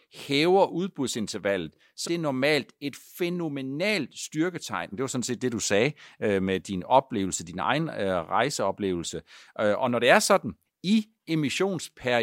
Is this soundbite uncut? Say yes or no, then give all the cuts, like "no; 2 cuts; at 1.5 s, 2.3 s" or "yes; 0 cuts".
no; 3 cuts; at 2.0 s, 4.9 s, 10.6 s